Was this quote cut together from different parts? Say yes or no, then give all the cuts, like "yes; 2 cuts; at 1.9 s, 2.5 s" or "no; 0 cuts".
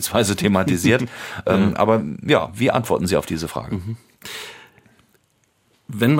no; 0 cuts